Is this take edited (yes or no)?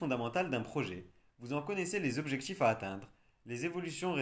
no